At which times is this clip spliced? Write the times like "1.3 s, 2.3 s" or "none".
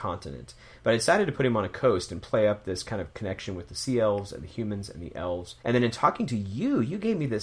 5.6 s